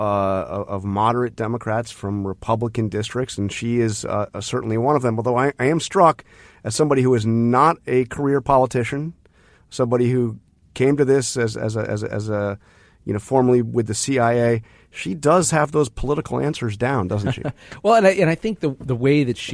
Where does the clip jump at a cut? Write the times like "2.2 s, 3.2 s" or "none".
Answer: none